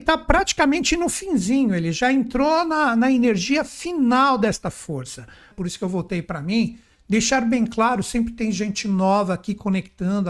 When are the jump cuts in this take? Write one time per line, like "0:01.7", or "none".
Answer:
0:05.5